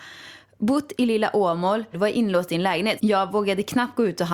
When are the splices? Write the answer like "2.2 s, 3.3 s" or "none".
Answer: 1.9 s, 3.0 s